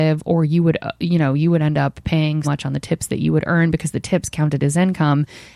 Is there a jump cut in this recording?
yes; 1 cut; at 2.4 s

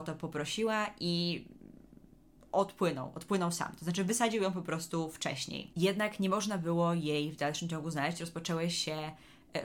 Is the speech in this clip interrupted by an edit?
no; 0 cuts

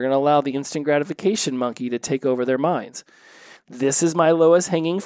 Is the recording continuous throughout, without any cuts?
no; 1 cut; at 3.6 s

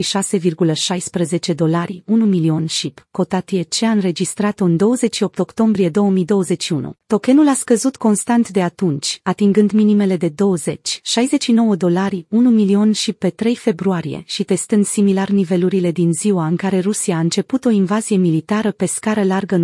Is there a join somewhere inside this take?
yes; 1 cut; at 7.0 s

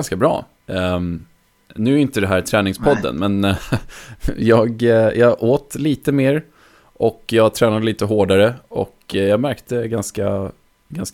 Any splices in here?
no; 0 cuts

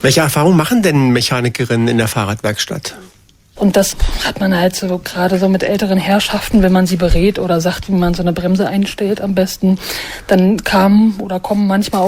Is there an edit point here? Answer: yes; 1 cut; at 3.6 s

